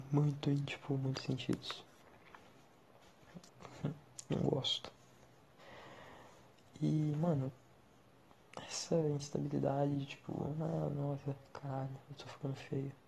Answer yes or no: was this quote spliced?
yes